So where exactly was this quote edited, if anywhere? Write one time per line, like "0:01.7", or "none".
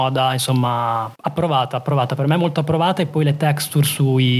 0:01.2

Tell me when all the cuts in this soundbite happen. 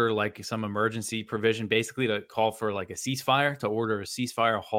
none

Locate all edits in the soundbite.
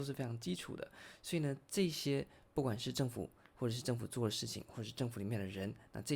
none

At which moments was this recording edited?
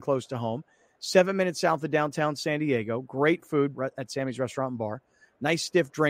0:03.7

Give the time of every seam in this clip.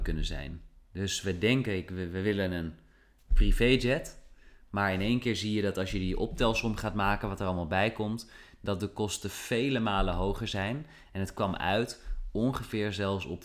none

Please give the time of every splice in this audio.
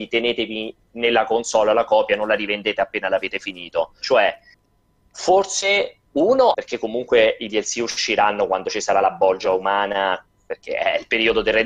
0:04.0
0:06.5

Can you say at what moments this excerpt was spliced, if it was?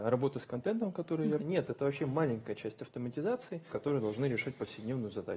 0:01.4
0:03.7

